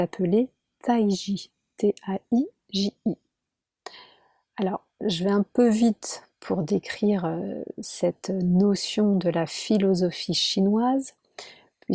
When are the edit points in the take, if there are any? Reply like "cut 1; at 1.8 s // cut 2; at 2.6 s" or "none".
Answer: none

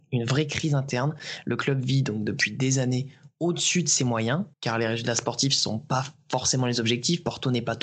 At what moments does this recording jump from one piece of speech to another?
cut 1; at 4.5 s

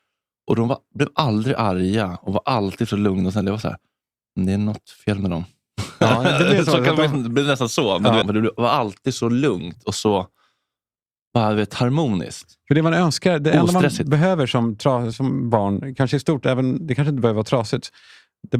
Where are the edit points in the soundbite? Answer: cut 1; at 8.2 s // cut 2; at 15.1 s

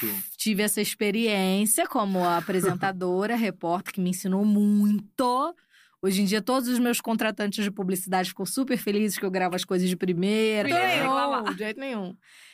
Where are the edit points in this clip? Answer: cut 1; at 10.6 s

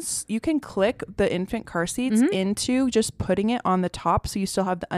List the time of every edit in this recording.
none

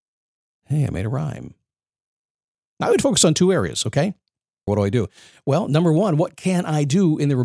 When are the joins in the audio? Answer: cut 1; at 4.7 s

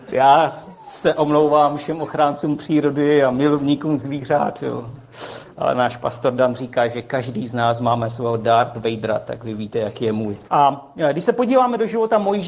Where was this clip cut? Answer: cut 1; at 10.5 s

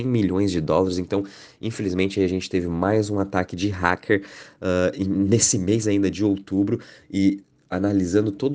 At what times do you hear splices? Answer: none

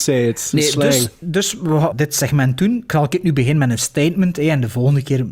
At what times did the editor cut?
cut 1; at 1.9 s

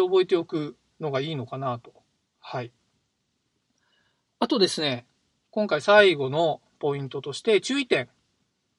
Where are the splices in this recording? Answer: none

